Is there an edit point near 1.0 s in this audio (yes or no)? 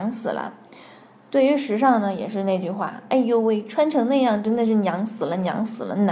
no